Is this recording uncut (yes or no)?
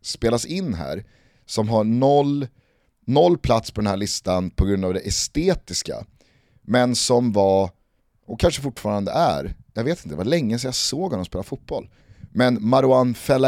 yes